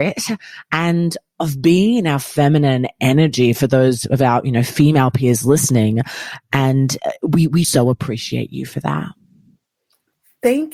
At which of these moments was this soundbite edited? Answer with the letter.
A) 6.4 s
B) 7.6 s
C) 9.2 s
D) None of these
B